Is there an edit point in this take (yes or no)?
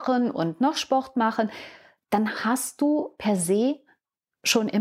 no